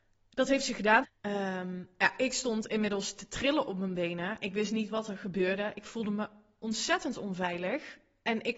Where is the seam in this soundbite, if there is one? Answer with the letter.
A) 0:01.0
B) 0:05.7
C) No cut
A